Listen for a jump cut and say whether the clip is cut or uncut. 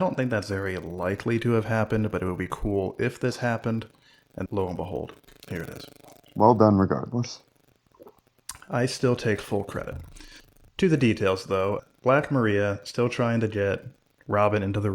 cut